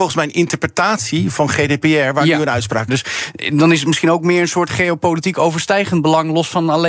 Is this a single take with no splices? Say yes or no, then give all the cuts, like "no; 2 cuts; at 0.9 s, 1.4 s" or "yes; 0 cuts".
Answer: no; 1 cut; at 2.9 s